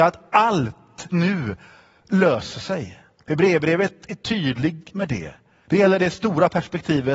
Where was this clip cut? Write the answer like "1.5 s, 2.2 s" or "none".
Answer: 1.1 s, 5.6 s